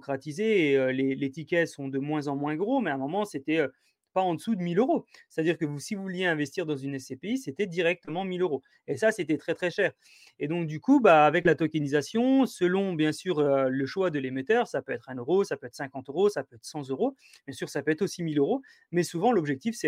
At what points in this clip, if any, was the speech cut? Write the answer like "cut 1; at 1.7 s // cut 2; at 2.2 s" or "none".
none